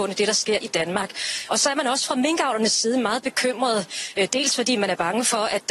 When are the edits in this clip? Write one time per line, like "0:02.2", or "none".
none